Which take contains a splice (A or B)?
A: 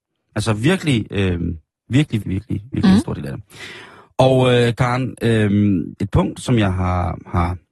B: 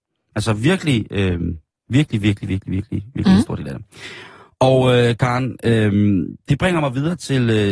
A